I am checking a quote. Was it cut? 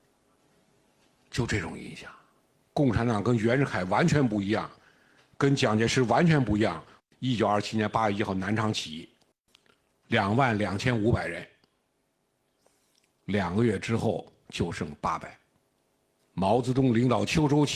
yes; 2 cuts; at 2.6 s, 16.2 s

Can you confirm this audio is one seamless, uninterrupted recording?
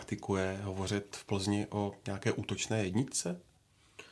yes; 0 cuts

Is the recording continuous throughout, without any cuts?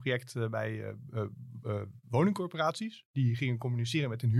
yes; 0 cuts

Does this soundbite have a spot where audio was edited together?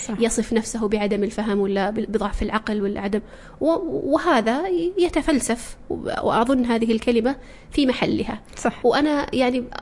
yes; 1 cut; at 8.8 s

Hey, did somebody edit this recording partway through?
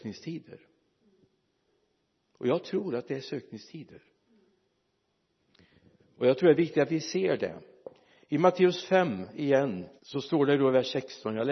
yes; 1 cut; at 10.0 s

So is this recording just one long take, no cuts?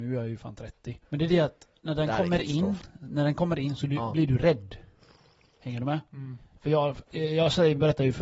no; 1 cut; at 1.0 s

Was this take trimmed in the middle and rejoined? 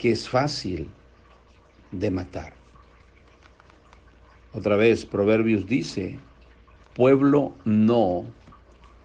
no; 0 cuts

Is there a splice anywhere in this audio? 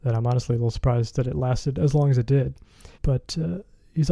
yes; 1 cut; at 2.9 s

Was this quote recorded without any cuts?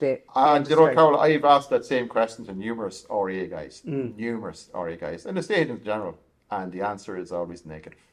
yes; 0 cuts

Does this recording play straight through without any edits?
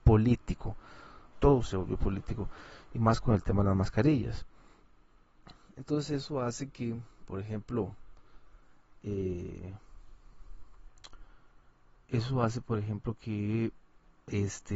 no; 1 cut; at 1.3 s

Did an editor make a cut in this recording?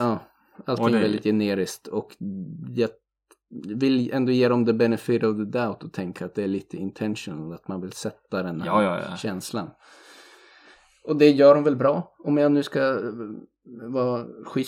no; 0 cuts

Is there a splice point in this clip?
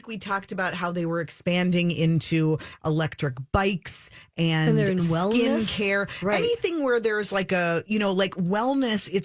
no; 0 cuts

